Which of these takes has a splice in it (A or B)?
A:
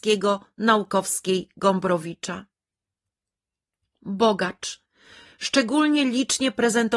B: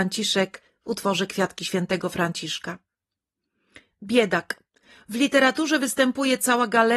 A